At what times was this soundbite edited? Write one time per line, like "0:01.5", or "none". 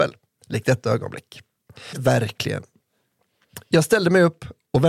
0:01.9